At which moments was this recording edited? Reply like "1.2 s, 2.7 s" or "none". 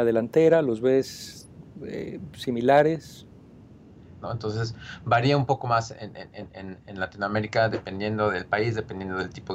4.2 s